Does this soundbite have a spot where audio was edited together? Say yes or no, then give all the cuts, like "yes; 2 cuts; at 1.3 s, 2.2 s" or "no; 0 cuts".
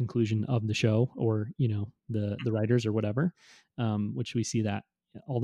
no; 0 cuts